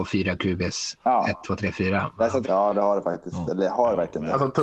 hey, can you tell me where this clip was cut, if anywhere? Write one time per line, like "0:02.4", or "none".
0:02.4

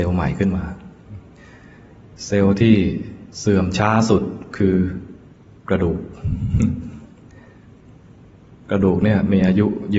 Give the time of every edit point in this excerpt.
0:03.3

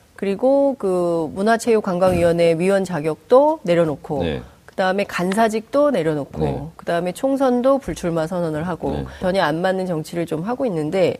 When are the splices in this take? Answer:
0:09.2

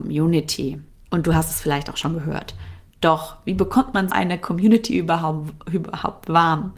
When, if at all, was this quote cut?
0:00.9
0:04.1

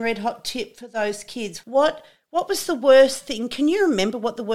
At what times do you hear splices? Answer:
0:01.6

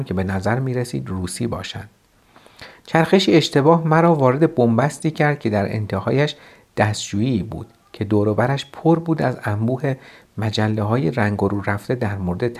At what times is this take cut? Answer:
none

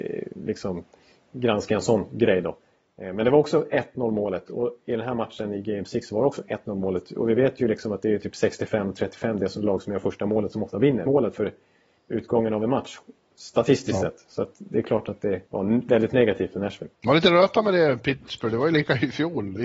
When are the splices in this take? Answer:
0:11.1
0:15.5
0:16.9

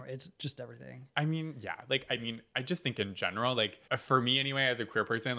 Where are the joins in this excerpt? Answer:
0:03.9

